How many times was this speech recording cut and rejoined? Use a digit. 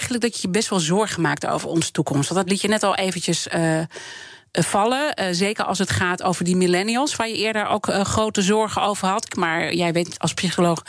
1